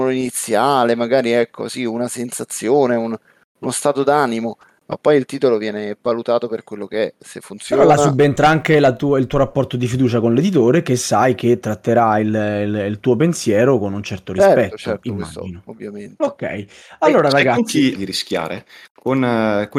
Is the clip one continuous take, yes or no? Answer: no